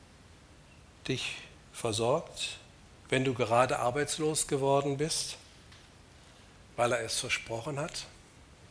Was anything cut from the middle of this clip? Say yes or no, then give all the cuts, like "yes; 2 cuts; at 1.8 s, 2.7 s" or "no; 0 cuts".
no; 0 cuts